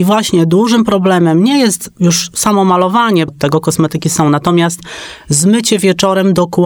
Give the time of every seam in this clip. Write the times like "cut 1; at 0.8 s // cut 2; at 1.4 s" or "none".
cut 1; at 3.3 s